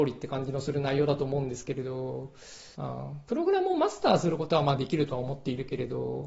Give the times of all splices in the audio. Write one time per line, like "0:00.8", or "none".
0:02.8